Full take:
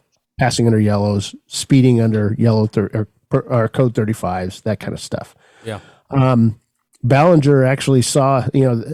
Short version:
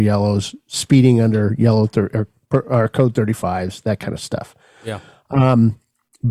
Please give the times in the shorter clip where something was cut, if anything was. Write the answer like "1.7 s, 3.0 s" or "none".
none

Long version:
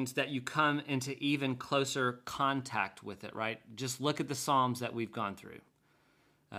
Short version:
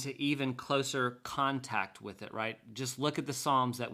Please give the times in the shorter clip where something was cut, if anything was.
none

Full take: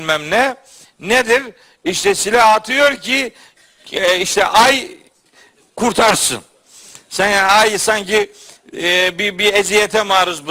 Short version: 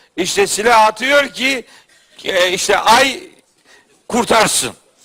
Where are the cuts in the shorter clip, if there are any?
none

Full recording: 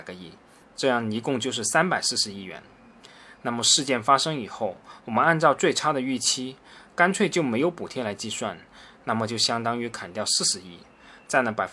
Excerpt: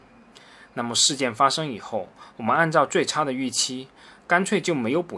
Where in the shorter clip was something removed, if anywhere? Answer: none

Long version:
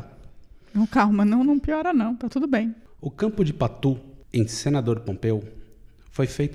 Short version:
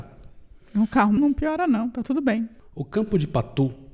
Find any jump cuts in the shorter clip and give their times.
1.2 s

